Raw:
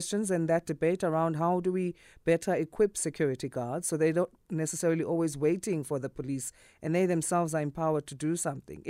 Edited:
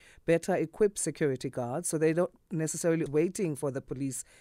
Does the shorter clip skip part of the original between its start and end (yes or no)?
yes